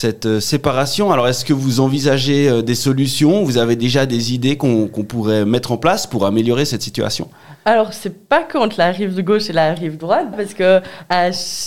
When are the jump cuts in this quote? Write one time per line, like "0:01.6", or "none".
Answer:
0:10.3